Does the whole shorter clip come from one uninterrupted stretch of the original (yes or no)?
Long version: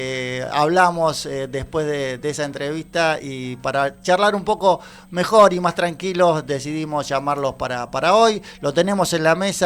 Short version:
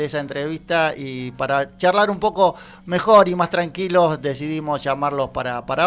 yes